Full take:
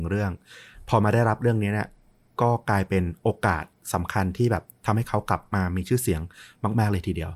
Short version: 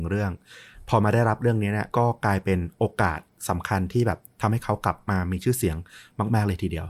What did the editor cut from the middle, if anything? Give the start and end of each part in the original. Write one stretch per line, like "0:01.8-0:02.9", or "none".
0:01.9-0:02.4